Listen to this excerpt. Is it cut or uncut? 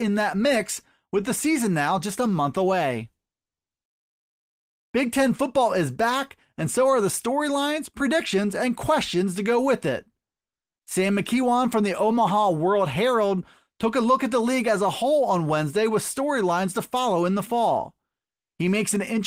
uncut